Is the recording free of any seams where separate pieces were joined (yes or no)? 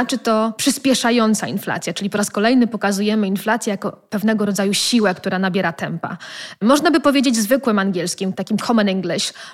yes